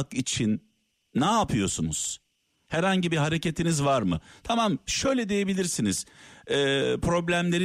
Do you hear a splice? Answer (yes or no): no